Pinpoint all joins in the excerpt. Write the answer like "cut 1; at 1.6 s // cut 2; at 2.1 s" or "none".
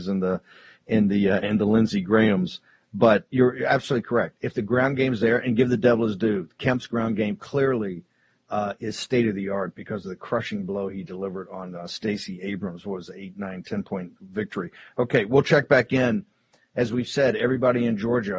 none